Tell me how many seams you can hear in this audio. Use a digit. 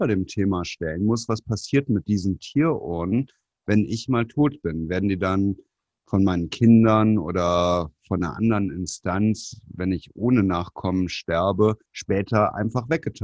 0